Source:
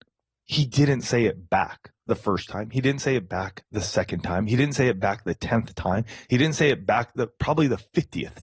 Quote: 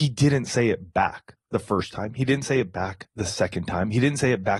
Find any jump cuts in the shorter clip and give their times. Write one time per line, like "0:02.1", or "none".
none